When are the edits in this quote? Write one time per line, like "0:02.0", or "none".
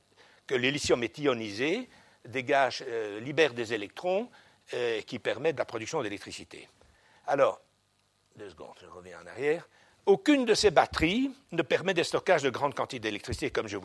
0:05.6